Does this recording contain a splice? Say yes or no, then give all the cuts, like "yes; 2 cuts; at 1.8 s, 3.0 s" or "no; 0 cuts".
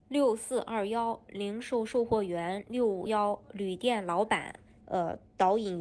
yes; 2 cuts; at 3.1 s, 4.8 s